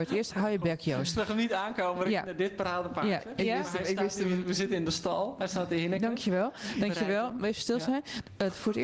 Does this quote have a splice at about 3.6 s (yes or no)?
no